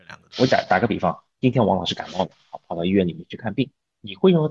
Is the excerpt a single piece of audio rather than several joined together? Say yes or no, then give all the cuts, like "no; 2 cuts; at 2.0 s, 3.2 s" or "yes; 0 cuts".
yes; 0 cuts